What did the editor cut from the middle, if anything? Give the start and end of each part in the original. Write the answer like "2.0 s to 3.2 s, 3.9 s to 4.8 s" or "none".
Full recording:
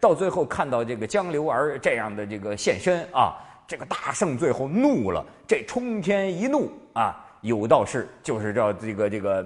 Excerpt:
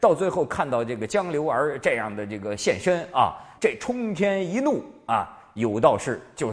3.6 s to 5.4 s